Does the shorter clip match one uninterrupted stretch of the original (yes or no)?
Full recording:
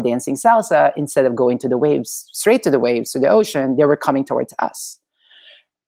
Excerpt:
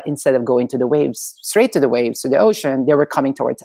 yes